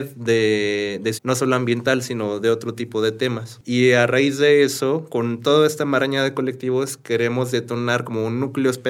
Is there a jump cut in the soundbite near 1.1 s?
yes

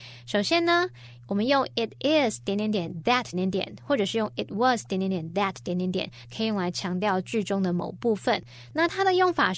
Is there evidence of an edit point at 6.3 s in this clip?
yes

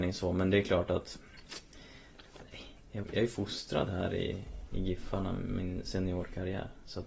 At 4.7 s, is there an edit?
no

